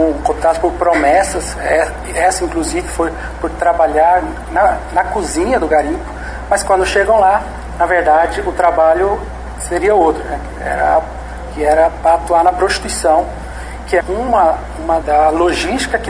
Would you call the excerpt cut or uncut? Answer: cut